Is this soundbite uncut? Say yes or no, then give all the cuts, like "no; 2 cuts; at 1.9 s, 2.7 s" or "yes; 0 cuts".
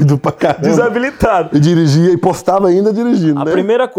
yes; 0 cuts